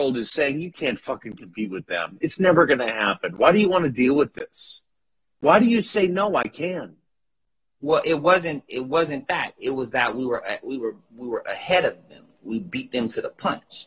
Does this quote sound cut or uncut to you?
uncut